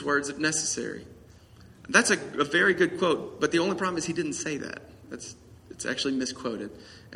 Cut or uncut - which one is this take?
uncut